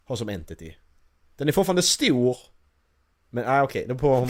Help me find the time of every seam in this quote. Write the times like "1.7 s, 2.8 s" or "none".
none